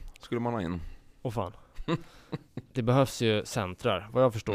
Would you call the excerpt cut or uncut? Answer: uncut